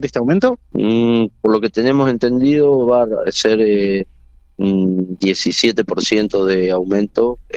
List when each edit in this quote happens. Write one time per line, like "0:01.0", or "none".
none